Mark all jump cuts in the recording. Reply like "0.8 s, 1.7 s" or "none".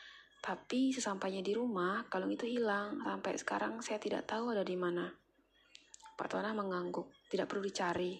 none